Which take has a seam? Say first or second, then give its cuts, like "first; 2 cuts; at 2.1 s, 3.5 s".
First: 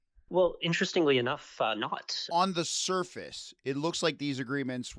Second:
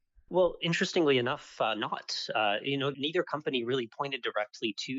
first; 1 cut; at 2.3 s